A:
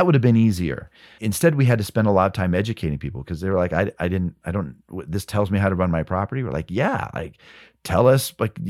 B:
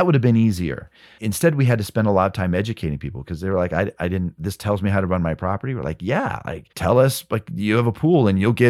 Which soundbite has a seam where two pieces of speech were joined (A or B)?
B